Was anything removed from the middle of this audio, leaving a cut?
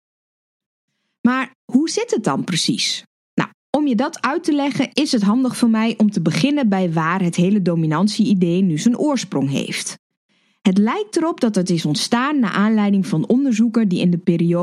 no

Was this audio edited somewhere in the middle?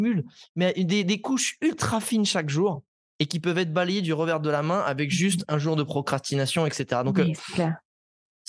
no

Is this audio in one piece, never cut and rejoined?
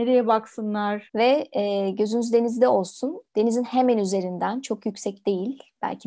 no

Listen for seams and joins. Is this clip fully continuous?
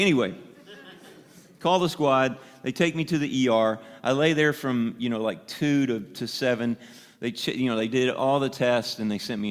yes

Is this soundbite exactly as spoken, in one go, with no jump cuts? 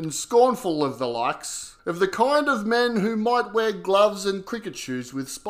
no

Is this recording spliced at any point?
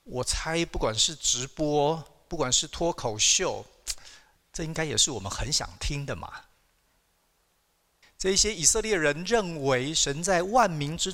yes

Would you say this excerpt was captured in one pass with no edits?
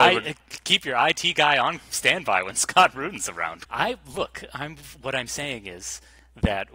no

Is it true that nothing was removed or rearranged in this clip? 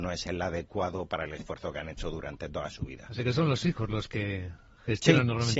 yes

